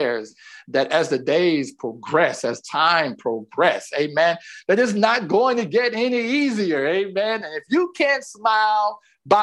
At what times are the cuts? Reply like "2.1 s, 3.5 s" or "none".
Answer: none